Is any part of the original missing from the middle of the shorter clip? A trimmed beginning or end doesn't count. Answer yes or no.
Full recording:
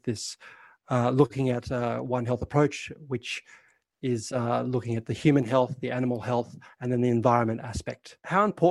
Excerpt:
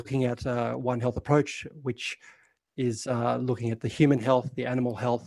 no